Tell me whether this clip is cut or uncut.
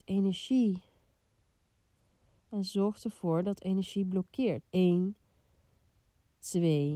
cut